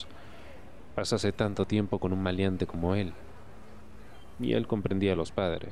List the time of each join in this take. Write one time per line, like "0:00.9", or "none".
none